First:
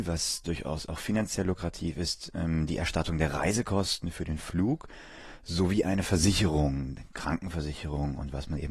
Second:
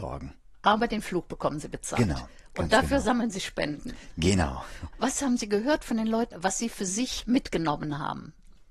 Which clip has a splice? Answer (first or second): second